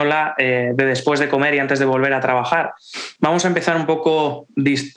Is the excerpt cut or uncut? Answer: cut